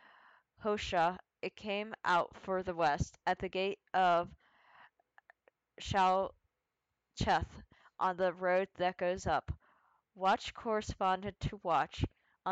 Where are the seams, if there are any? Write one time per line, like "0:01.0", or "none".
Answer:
none